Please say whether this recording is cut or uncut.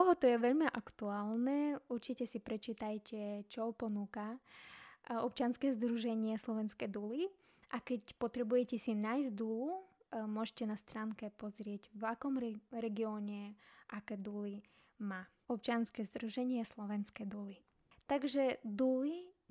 uncut